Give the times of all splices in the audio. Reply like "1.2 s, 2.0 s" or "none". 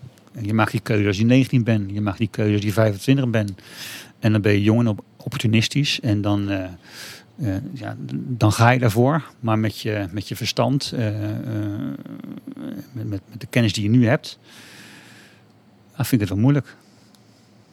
none

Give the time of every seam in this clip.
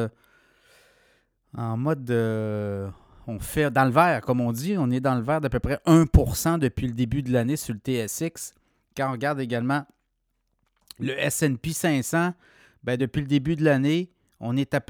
none

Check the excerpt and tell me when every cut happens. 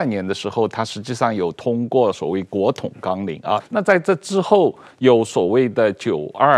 3.6 s

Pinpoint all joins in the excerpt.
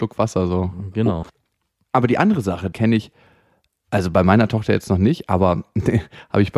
1.2 s, 2.7 s

